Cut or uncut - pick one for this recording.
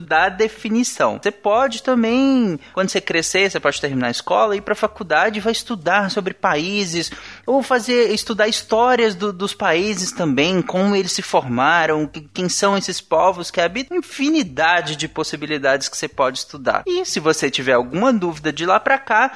cut